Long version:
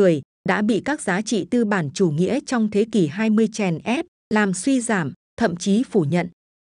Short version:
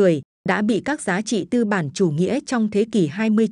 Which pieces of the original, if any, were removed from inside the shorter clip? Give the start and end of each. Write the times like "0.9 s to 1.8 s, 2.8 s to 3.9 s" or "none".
none